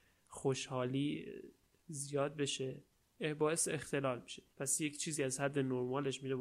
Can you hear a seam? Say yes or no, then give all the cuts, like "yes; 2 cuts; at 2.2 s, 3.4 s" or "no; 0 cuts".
yes; 1 cut; at 4.5 s